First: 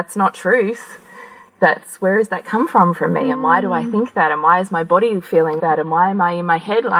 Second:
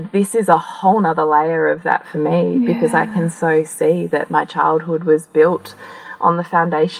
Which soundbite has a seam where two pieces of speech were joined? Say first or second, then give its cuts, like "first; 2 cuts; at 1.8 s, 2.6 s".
first; 1 cut; at 5.6 s